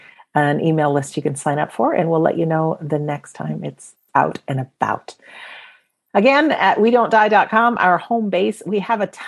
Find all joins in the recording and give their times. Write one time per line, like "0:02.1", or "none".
none